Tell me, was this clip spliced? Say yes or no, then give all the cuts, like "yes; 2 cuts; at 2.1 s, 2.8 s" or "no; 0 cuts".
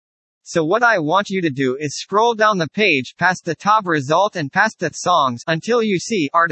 no; 0 cuts